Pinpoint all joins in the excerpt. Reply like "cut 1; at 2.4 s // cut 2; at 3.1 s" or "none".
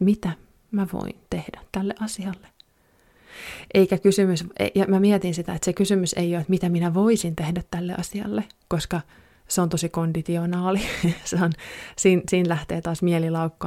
none